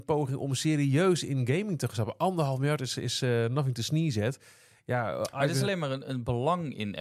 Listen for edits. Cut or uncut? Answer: uncut